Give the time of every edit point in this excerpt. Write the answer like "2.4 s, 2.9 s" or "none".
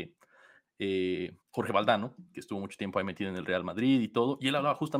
1.4 s

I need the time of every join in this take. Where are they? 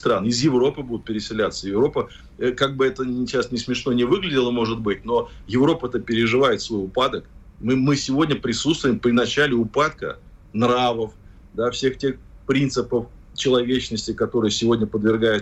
none

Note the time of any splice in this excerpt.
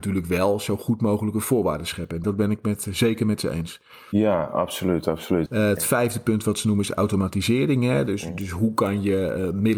2.2 s, 5.5 s

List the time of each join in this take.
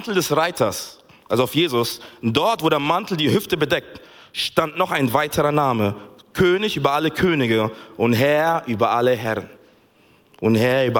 none

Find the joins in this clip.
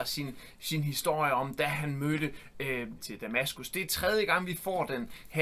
3.0 s

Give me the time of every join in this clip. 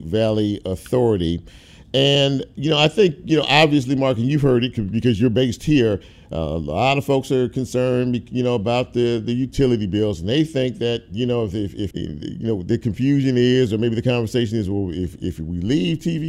11.9 s

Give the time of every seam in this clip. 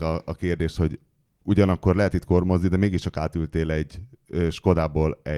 none

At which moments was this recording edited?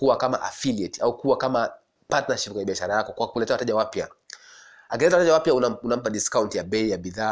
none

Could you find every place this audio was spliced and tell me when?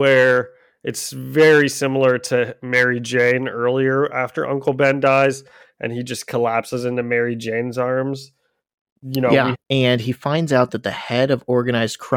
9.5 s

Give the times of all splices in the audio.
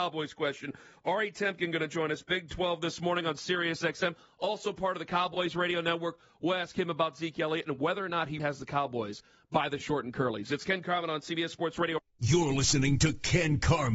8.4 s

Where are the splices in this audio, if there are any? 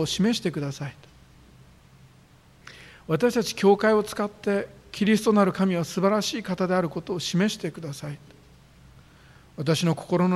none

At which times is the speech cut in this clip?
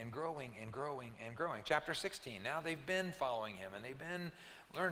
none

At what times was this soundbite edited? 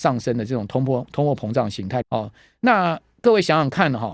2.0 s

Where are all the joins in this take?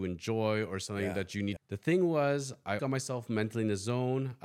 1.6 s, 2.8 s

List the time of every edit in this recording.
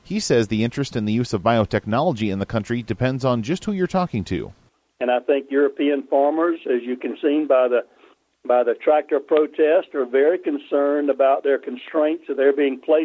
none

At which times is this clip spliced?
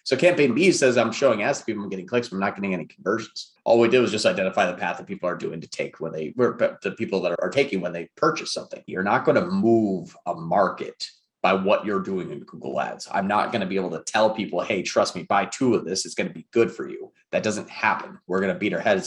8.9 s

